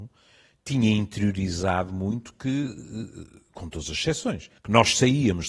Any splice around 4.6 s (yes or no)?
yes